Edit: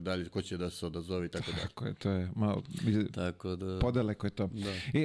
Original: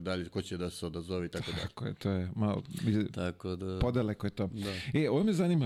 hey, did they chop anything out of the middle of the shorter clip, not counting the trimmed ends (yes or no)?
no